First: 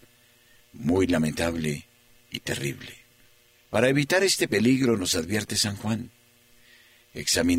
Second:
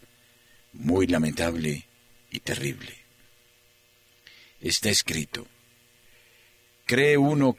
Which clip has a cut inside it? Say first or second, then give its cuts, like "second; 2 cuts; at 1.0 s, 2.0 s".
first; 1 cut; at 3.5 s